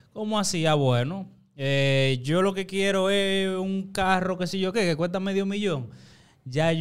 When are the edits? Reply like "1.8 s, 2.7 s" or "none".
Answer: none